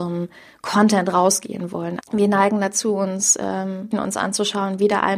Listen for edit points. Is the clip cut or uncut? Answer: cut